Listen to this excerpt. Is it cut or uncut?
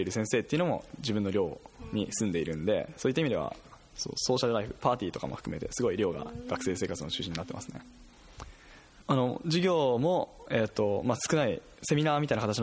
cut